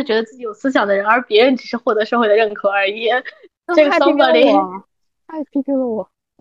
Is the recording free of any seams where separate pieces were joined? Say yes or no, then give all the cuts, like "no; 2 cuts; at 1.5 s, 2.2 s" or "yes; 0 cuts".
yes; 0 cuts